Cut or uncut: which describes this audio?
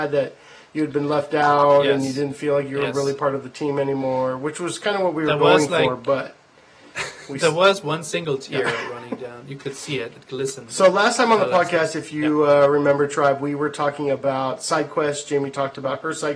uncut